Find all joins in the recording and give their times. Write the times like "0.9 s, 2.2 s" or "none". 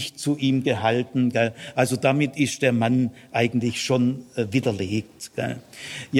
none